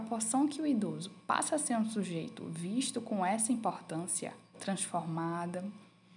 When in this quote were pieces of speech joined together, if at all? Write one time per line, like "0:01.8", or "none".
0:04.5